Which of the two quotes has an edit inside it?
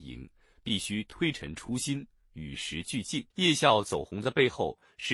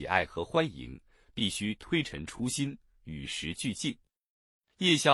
first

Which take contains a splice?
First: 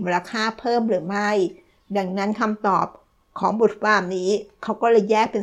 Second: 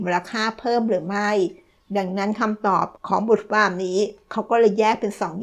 second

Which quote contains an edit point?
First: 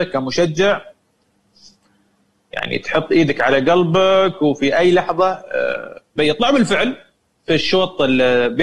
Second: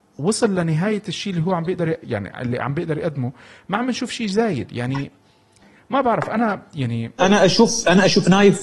second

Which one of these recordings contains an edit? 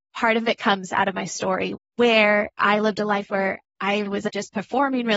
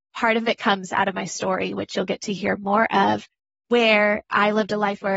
first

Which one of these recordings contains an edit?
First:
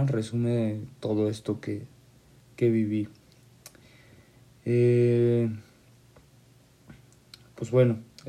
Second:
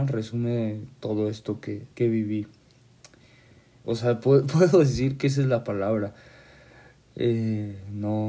second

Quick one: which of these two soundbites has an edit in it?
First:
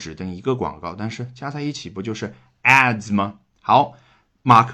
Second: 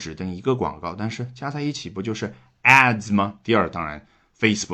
second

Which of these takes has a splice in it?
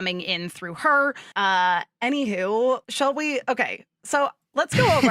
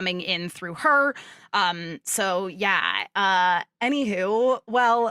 first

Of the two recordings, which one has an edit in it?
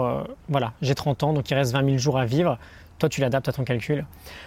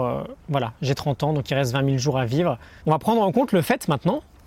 second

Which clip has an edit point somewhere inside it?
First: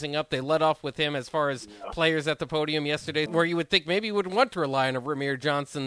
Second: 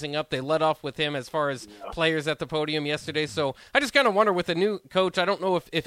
first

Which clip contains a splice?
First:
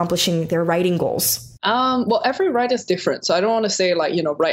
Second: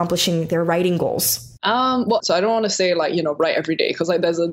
second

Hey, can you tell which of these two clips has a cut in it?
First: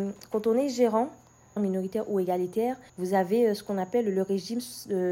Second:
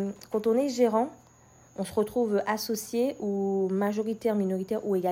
first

